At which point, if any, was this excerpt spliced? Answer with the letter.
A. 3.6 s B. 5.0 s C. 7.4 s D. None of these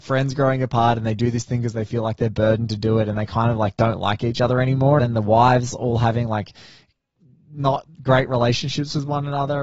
B